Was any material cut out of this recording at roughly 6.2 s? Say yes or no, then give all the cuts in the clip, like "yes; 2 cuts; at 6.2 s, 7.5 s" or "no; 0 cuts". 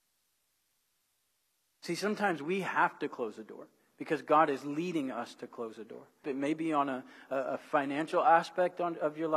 yes; 1 cut; at 6.2 s